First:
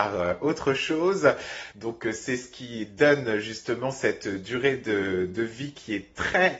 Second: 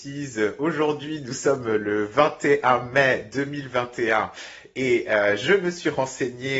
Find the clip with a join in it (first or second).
first